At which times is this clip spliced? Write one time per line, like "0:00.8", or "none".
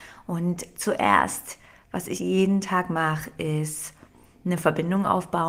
0:02.2